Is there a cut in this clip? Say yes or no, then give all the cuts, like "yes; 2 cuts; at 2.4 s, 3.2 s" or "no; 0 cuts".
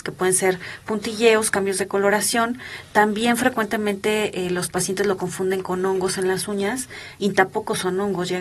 no; 0 cuts